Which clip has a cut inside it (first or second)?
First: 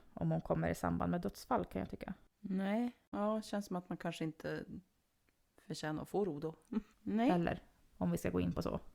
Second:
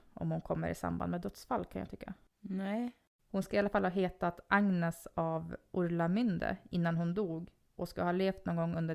first